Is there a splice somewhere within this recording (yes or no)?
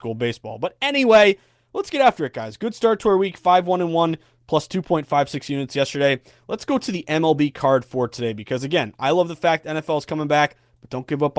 no